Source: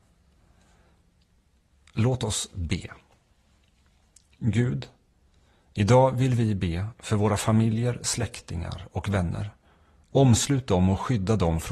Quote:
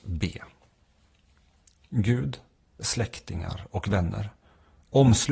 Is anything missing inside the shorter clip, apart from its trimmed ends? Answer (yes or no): yes